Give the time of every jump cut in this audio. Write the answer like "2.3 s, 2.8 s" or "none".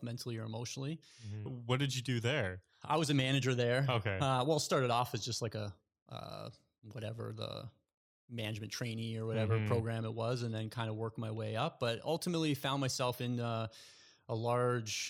1.5 s